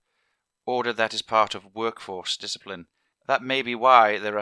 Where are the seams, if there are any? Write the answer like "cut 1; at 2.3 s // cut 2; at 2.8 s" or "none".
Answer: cut 1; at 3.1 s